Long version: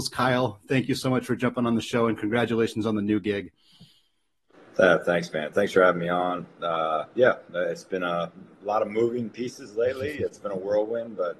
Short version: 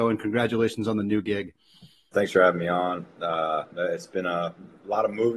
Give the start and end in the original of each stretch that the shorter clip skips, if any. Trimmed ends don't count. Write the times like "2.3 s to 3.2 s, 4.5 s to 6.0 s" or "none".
4.1 s to 5.5 s, 7.1 s to 7.5 s